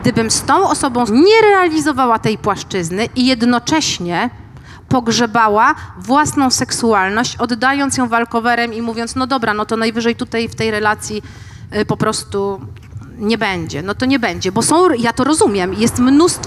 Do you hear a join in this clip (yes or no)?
yes